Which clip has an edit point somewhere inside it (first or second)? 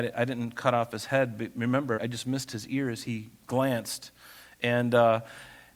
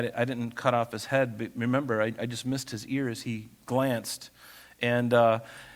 first